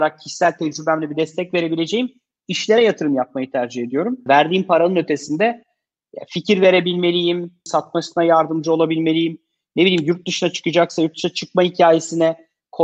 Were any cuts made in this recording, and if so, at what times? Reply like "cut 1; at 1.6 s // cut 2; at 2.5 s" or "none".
cut 1; at 4.3 s // cut 2; at 7.7 s